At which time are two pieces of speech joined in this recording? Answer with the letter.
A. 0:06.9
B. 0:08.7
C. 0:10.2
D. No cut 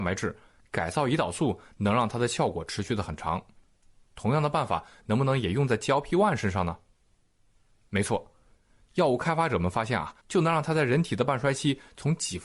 C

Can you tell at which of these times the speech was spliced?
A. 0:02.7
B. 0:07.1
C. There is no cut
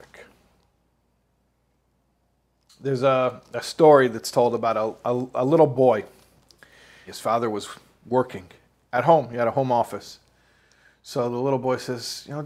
B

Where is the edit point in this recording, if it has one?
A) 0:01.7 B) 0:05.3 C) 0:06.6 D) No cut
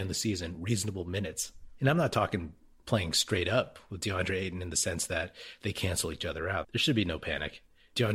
C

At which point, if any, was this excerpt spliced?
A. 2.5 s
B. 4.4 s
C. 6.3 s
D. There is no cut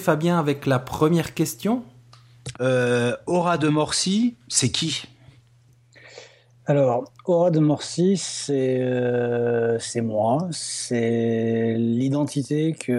A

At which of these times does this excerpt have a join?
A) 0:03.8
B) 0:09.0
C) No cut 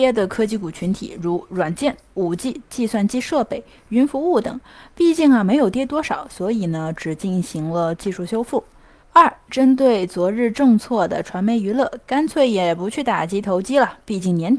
B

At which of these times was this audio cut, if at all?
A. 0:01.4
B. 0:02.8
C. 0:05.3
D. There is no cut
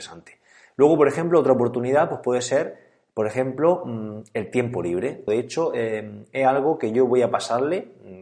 C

